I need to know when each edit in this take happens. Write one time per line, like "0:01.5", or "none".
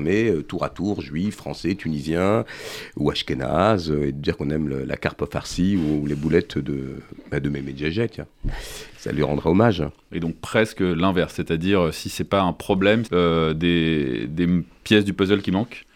0:10.1
0:13.1